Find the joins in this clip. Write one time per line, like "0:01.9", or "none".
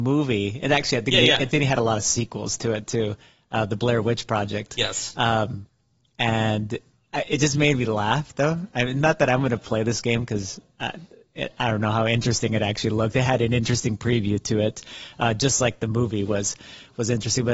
none